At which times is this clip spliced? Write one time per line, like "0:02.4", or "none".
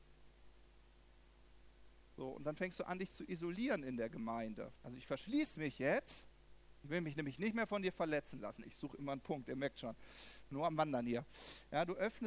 0:04.8
0:08.6